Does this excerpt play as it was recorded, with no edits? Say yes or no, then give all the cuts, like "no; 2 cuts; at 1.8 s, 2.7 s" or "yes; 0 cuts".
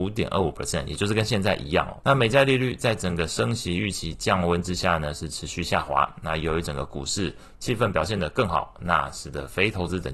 no; 1 cut; at 2.0 s